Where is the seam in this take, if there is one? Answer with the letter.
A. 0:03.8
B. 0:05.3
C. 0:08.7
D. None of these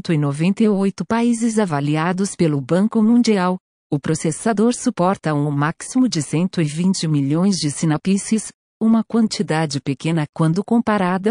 A